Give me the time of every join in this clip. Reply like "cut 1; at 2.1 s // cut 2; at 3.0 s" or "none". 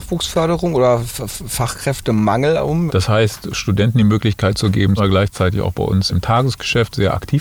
cut 1; at 2.9 s // cut 2; at 5.0 s // cut 3; at 6.1 s